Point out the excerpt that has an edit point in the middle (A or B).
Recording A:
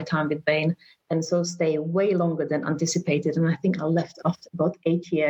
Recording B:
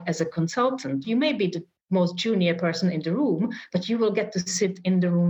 B